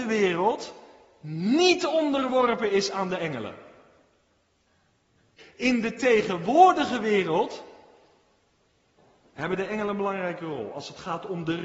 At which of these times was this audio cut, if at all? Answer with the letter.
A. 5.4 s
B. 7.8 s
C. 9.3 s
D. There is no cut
A